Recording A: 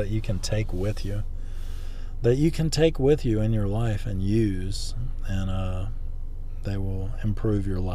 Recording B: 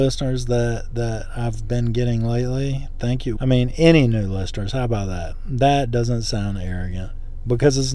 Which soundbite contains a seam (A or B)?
B